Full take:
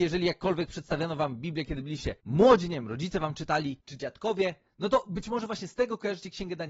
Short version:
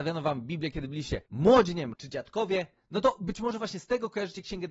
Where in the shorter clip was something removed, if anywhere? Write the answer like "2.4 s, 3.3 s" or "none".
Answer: 1.9 s

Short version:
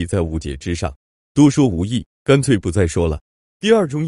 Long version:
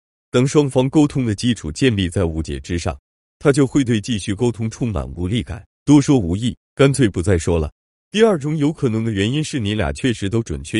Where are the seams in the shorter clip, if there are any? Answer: 1.2 s

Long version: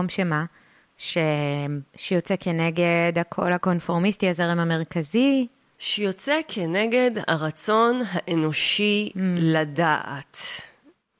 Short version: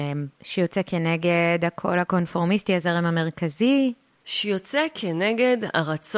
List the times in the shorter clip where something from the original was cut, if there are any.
none

